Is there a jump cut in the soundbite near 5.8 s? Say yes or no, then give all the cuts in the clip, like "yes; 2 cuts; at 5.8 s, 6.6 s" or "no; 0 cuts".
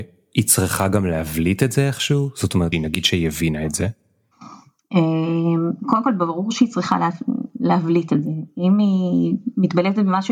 no; 1 cut; at 2.7 s